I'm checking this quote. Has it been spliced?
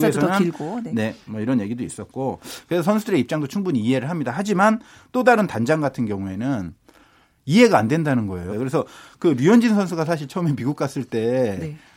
yes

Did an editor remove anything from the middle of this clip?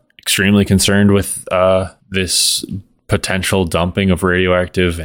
yes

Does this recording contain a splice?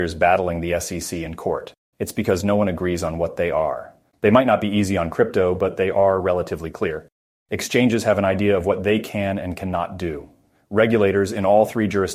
yes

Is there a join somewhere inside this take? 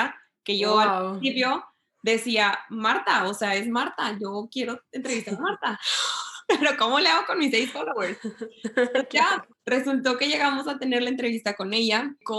no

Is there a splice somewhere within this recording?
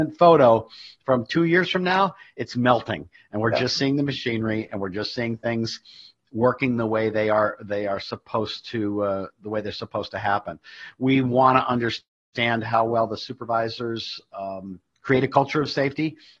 no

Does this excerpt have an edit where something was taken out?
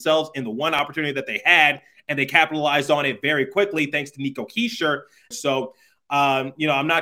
yes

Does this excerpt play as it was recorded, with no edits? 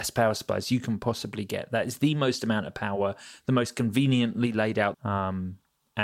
no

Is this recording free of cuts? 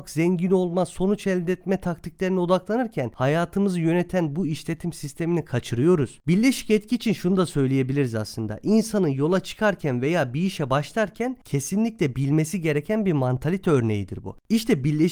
yes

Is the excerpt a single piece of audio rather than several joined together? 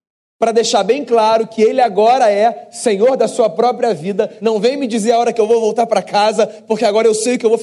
yes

